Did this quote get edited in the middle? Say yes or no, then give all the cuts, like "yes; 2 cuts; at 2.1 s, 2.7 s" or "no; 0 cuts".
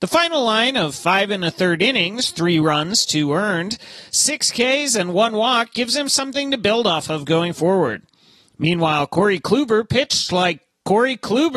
no; 0 cuts